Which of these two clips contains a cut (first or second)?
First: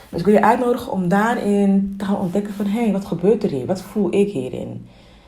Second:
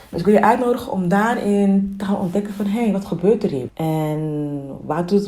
second